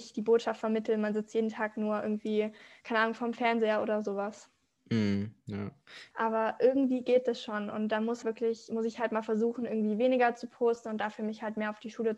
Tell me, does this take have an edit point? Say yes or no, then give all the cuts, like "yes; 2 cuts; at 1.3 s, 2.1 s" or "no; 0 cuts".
yes; 2 cuts; at 6.1 s, 8.2 s